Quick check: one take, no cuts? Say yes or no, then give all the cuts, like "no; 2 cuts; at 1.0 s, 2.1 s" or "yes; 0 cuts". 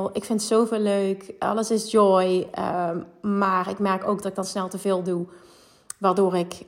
yes; 0 cuts